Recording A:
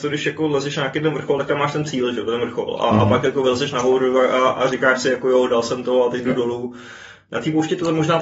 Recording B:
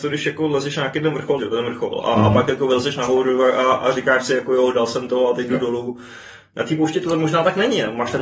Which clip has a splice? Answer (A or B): B